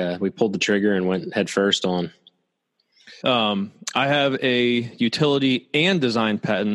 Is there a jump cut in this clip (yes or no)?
yes